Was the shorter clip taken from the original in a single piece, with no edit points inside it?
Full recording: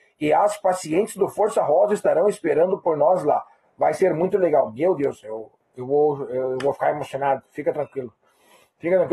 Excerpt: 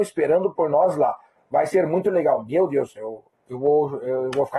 yes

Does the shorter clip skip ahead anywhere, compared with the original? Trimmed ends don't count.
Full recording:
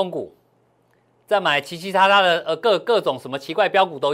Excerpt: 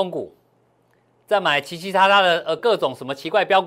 yes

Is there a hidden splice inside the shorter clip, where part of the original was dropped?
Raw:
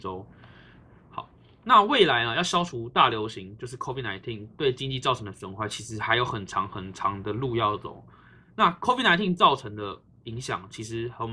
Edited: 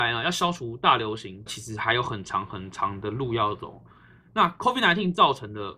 yes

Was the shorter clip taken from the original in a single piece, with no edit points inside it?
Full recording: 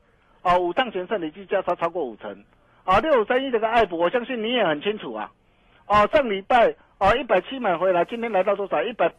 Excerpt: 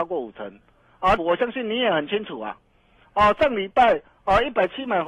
no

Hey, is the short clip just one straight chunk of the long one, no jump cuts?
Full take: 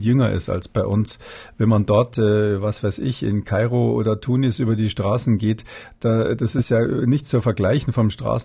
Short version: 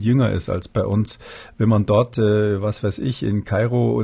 yes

